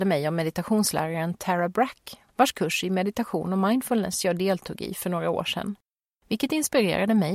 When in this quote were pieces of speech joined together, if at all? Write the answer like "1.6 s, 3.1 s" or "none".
none